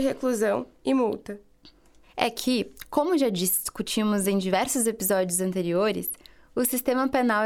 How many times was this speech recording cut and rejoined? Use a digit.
1